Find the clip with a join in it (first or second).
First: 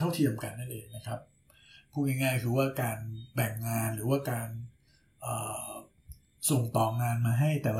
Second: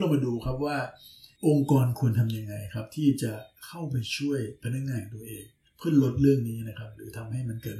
second